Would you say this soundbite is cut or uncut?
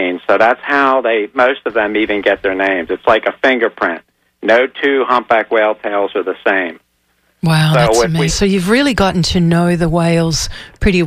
cut